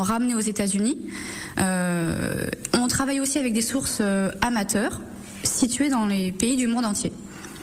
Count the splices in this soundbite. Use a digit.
0